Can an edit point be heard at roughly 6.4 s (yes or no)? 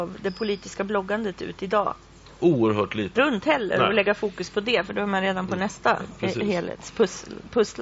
no